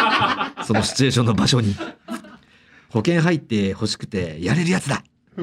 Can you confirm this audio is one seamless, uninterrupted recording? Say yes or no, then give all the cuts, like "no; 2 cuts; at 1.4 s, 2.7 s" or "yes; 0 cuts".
yes; 0 cuts